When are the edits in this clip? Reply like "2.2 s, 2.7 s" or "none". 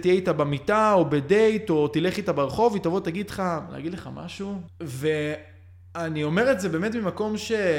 4.7 s